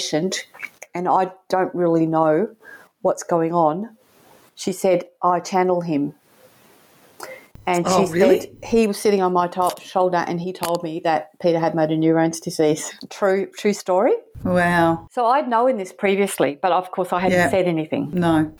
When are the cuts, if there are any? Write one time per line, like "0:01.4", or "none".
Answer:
none